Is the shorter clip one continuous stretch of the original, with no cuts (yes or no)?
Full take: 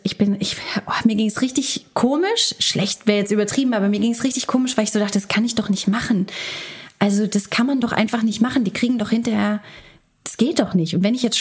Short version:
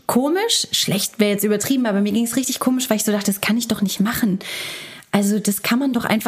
yes